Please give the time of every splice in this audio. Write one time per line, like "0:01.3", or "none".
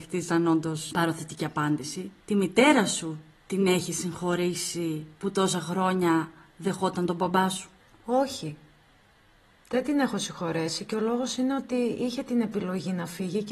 none